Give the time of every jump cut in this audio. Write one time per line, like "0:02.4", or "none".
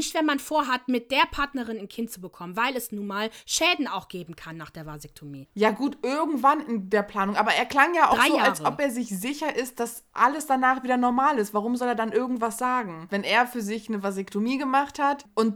0:05.5
0:13.1